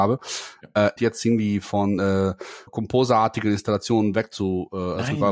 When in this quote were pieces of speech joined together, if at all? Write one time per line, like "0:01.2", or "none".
0:01.0
0:02.7